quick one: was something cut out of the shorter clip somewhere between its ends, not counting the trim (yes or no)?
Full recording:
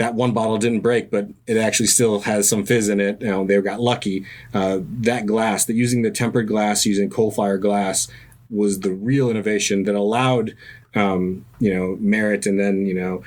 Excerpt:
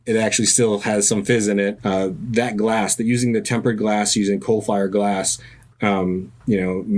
yes